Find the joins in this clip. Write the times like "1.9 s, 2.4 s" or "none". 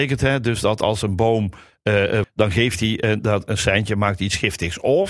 2.2 s